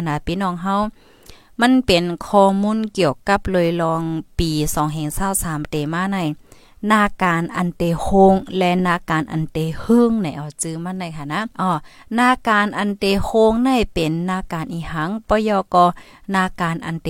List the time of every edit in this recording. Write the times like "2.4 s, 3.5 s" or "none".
11.5 s